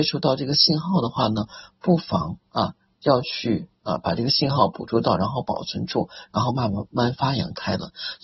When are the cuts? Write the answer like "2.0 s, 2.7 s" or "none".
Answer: none